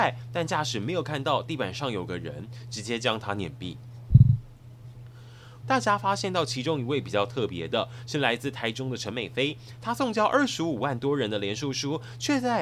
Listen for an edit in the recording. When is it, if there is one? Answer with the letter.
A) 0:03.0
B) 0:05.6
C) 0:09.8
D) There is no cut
B